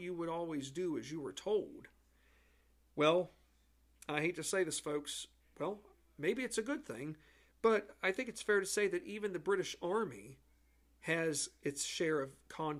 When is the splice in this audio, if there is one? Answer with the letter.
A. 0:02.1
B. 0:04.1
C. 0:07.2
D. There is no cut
D